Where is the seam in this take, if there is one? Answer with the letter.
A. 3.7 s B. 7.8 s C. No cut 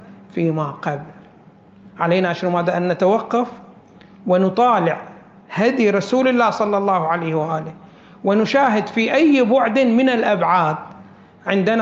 C